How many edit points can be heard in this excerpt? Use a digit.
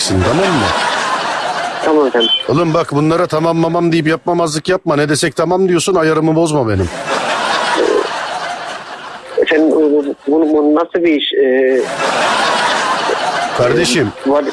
1